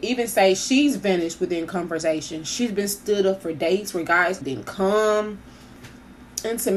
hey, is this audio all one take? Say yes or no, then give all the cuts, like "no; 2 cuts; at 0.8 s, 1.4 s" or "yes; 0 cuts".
no; 1 cut; at 4.4 s